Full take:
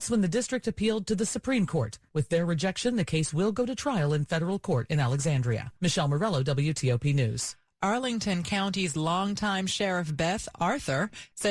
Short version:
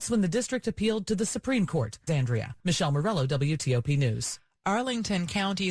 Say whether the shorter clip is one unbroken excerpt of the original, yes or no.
no